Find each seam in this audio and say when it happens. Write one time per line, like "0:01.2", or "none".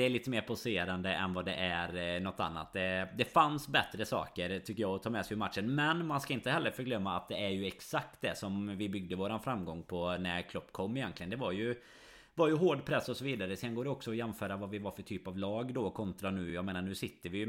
none